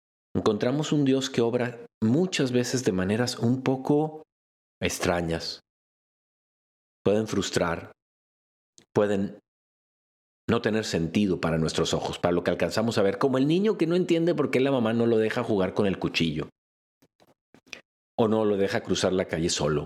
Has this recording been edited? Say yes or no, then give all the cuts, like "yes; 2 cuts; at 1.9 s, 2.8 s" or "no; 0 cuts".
no; 0 cuts